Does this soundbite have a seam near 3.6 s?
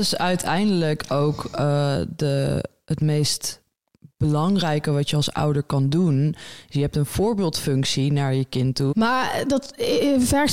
no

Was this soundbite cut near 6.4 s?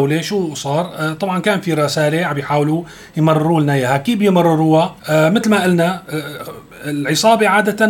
no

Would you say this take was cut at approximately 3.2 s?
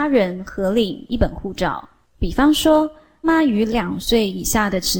yes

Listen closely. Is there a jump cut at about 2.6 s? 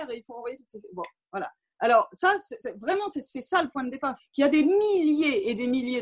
yes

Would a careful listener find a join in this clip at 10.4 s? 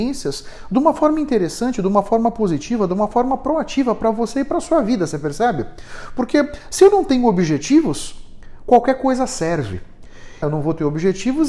yes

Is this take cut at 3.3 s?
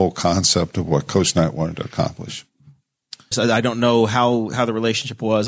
yes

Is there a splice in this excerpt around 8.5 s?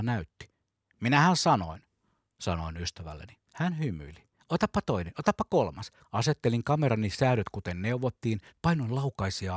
yes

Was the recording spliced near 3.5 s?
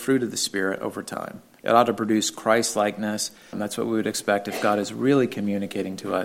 yes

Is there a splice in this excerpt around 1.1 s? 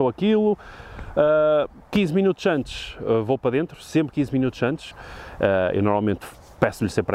no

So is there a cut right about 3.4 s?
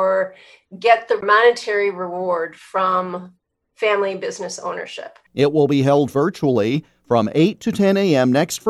no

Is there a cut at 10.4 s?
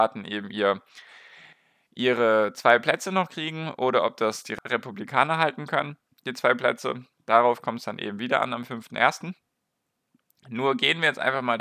no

